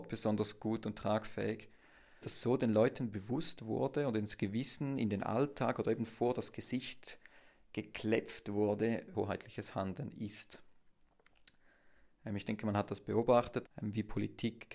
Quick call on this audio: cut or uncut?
cut